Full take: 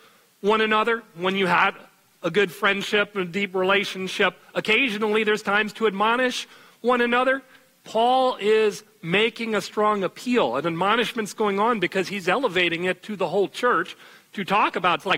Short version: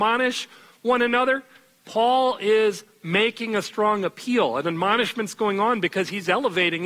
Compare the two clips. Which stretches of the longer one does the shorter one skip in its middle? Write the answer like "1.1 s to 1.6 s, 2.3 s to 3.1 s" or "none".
none